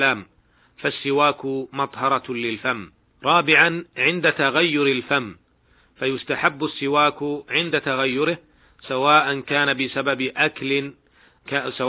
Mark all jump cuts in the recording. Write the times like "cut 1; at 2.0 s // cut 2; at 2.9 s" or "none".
cut 1; at 3.2 s